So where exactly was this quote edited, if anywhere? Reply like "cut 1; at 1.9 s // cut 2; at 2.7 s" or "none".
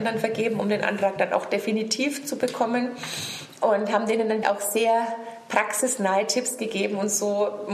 cut 1; at 4.4 s